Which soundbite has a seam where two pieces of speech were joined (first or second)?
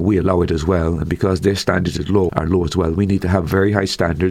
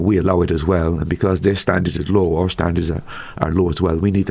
first